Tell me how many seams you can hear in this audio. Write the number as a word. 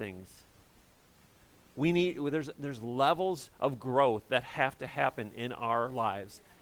zero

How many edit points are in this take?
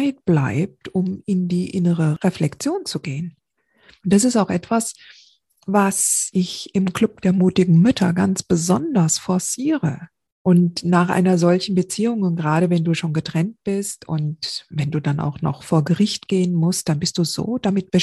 two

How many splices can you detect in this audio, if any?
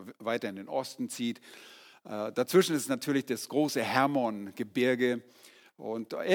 zero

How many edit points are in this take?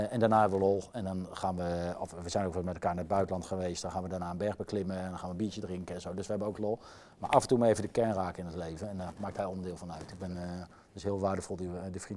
zero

